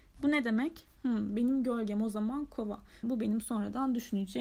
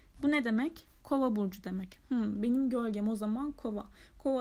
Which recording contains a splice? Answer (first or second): first